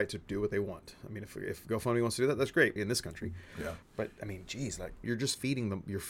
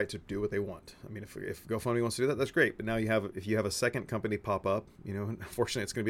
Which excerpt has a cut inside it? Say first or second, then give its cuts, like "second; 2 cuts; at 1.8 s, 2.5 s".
first; 3 cuts; at 2.8 s, 3.8 s, 5.0 s